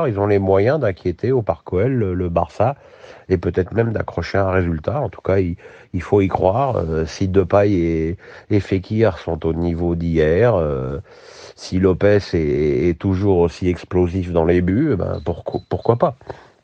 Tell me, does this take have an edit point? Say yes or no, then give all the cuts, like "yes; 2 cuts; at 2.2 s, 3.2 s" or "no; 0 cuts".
no; 0 cuts